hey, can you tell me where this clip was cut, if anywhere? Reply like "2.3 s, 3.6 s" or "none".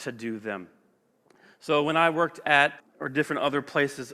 2.8 s